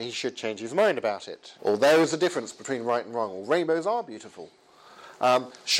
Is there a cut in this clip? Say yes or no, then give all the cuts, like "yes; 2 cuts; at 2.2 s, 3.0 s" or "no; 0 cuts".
yes; 1 cut; at 1.6 s